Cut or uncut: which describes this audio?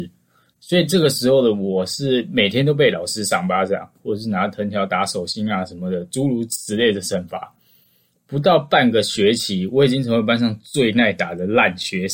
uncut